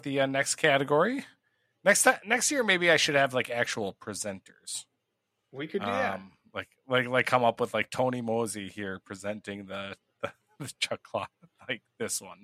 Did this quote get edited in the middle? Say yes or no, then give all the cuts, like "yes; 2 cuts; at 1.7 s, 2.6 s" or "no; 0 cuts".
no; 0 cuts